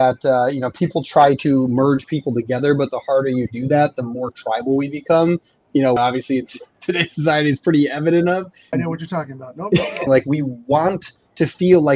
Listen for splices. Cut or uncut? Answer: cut